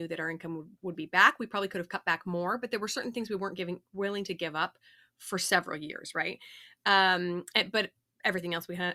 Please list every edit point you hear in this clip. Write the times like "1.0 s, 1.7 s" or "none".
none